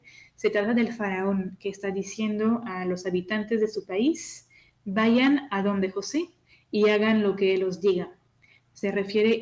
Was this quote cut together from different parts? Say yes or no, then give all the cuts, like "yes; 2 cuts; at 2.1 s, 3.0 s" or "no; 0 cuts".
no; 0 cuts